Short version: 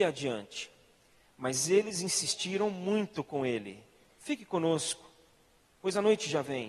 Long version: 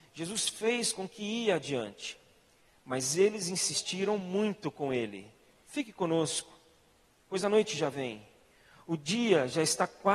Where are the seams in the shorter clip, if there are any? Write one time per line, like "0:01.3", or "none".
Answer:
none